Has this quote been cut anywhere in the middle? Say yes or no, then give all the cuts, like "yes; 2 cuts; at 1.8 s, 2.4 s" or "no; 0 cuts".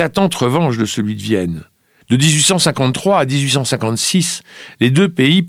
yes; 1 cut; at 2.0 s